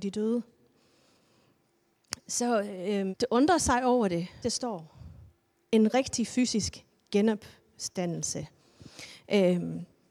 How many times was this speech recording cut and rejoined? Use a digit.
2